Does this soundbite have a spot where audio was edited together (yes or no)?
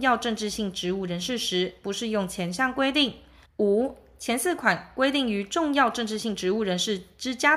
yes